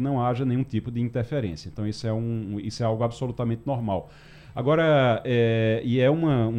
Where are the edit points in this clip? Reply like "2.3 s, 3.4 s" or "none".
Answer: none